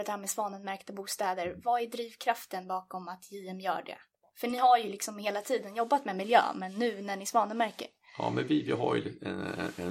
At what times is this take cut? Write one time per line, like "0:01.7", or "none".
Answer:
none